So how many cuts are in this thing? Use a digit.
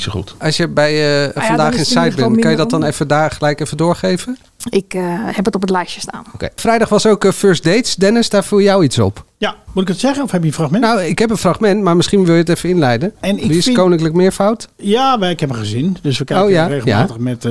1